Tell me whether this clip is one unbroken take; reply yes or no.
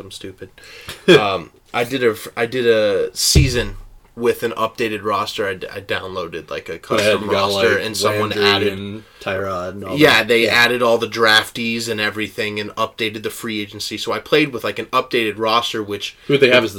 yes